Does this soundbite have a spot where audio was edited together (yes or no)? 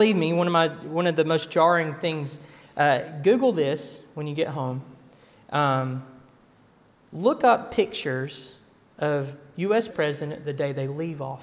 yes